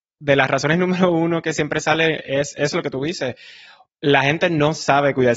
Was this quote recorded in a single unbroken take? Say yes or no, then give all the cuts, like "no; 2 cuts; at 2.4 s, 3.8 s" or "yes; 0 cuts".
yes; 0 cuts